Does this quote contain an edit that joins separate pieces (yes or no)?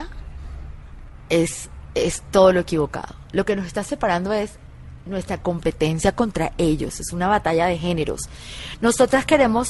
no